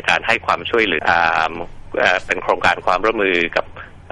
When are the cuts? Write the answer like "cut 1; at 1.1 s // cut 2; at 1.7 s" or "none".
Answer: cut 1; at 1.0 s